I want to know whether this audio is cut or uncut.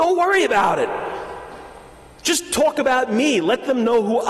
uncut